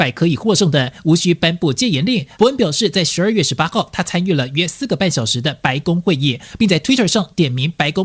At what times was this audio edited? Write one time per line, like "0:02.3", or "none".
0:02.4